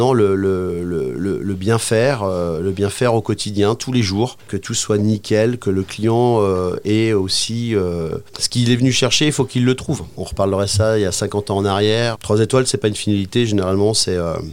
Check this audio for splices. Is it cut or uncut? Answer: cut